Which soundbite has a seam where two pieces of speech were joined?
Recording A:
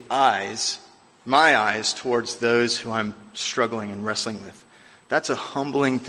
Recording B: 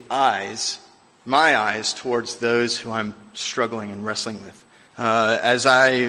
B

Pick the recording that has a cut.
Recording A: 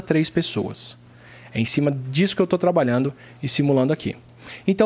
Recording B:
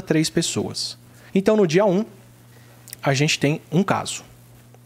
B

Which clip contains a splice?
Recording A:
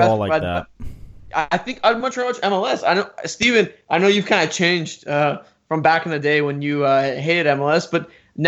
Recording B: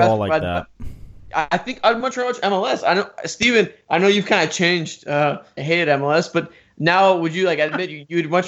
B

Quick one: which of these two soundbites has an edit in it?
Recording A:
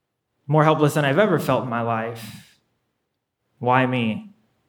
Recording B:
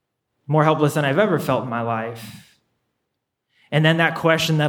A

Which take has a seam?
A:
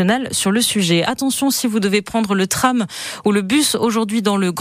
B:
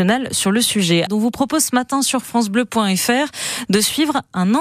B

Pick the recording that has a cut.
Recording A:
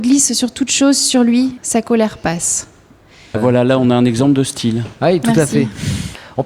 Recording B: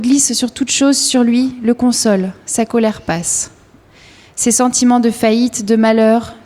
A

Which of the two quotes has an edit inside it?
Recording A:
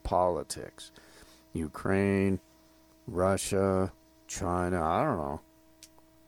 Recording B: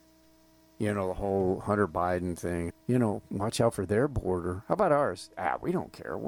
B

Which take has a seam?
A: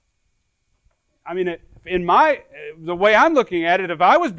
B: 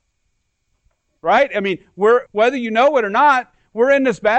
B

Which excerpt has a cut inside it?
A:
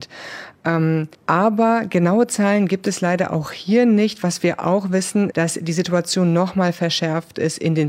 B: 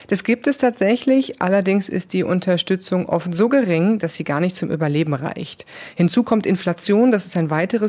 A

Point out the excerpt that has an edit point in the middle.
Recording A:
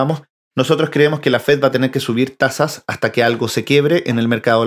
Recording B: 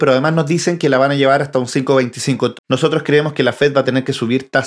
B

